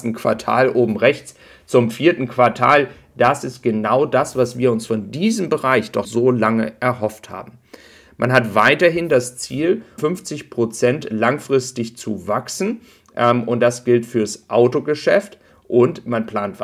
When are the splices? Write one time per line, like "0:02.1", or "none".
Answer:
0:06.0
0:10.0